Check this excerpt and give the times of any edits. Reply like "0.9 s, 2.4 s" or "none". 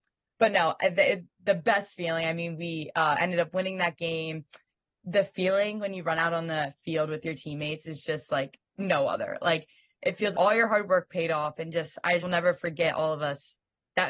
8.7 s, 10.3 s, 12.2 s

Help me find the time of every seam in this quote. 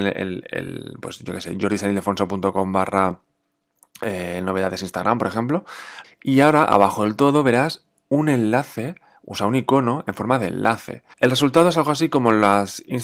6.0 s, 11.1 s

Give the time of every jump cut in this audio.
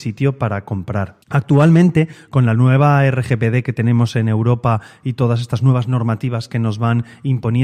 1.2 s

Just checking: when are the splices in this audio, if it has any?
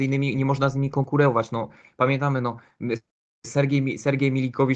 none

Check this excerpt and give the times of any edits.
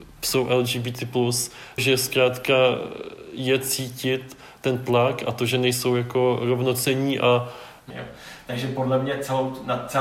1.8 s, 7.9 s

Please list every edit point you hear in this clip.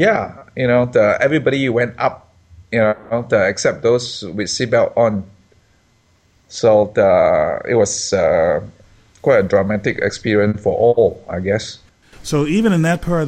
12.0 s

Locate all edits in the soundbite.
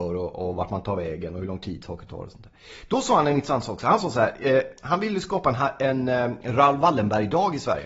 none

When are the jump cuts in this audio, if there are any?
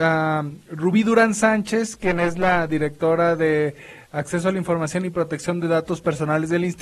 none

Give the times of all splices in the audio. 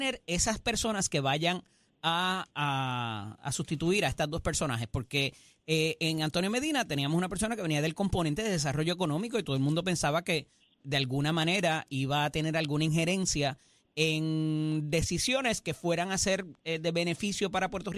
none

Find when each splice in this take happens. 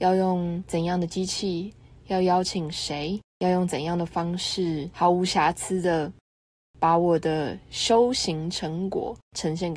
none

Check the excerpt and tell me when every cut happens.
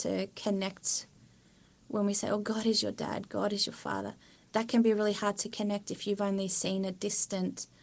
none

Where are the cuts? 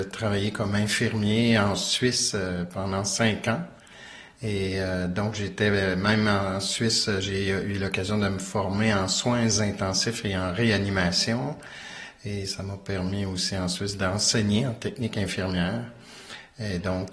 none

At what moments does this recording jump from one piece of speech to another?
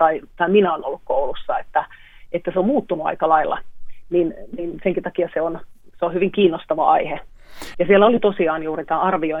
7.7 s

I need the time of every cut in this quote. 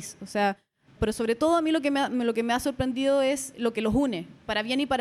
1.0 s, 3.5 s

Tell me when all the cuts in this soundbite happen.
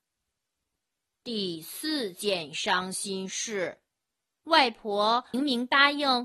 5.3 s

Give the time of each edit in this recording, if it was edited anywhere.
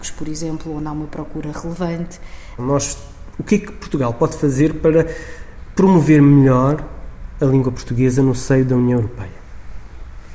2.6 s

